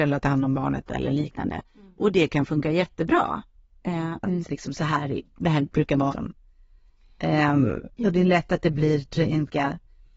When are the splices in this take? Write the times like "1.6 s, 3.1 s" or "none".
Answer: 4.2 s, 6.1 s, 7.9 s